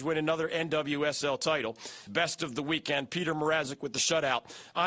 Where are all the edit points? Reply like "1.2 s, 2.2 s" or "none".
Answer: 2.1 s